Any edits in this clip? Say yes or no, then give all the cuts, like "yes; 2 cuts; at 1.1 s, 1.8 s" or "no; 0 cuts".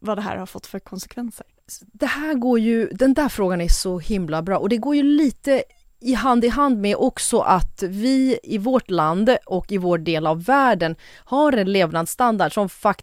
no; 0 cuts